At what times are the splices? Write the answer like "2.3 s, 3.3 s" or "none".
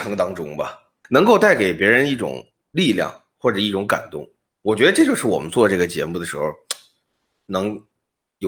none